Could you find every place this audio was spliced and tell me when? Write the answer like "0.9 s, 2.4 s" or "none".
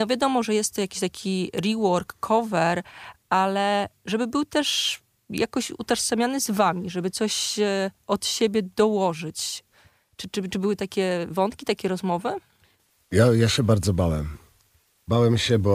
none